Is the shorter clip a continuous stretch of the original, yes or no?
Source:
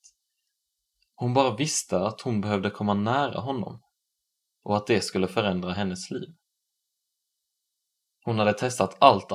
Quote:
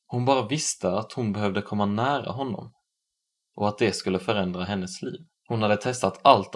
no